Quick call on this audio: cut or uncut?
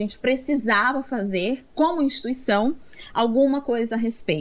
uncut